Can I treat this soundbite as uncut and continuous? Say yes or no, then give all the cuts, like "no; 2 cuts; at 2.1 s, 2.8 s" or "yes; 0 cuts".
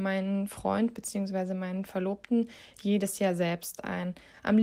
yes; 0 cuts